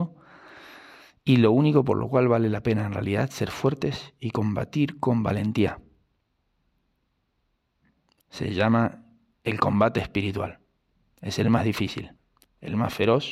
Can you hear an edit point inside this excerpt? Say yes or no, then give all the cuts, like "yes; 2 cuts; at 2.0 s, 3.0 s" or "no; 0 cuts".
no; 0 cuts